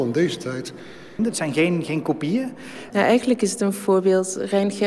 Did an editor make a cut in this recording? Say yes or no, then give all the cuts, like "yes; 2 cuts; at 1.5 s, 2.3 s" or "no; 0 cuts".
yes; 2 cuts; at 1.2 s, 2.9 s